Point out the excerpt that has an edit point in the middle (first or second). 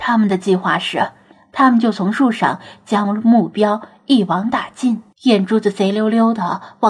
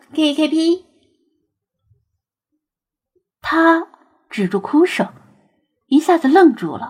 first